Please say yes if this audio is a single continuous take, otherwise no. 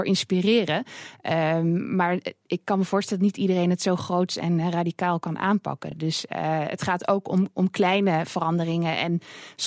yes